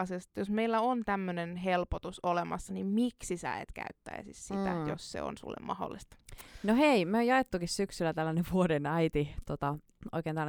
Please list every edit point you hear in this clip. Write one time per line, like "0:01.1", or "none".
none